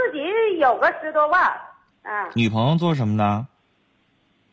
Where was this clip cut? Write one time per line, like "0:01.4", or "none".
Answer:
0:01.9